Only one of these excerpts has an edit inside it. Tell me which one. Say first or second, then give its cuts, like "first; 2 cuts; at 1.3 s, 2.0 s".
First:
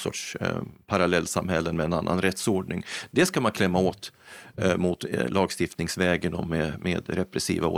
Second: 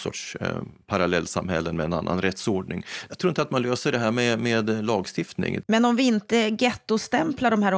second; 2 cuts; at 3.1 s, 5.6 s